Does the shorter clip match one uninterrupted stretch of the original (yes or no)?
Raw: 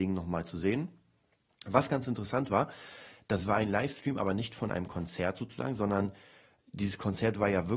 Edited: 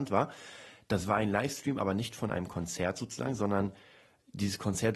yes